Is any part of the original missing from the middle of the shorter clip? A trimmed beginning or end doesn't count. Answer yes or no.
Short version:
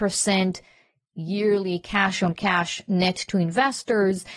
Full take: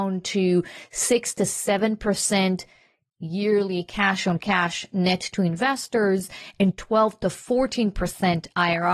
no